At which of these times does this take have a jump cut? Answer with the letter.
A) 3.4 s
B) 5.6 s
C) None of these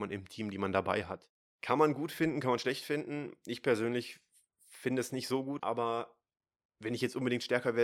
B